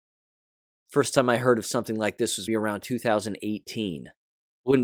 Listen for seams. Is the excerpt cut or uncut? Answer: cut